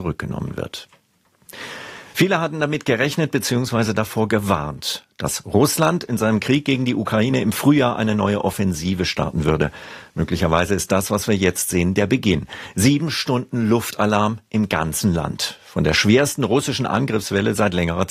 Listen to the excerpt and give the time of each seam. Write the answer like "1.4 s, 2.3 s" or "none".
none